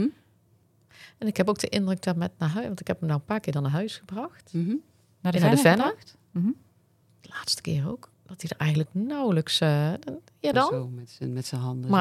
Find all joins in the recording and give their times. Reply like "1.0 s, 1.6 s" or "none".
10.5 s